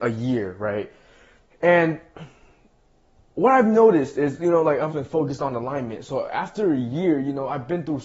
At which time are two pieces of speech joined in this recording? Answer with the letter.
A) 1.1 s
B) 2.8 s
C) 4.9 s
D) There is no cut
C